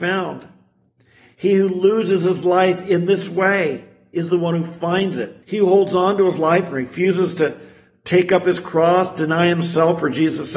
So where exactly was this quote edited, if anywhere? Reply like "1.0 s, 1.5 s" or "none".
5.4 s